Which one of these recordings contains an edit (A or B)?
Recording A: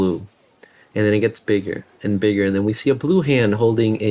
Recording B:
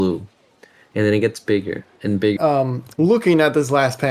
B